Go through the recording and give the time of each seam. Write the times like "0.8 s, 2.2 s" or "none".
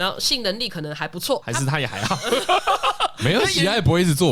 1.4 s